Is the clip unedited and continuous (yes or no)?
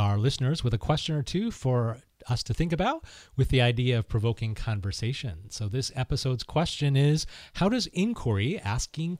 yes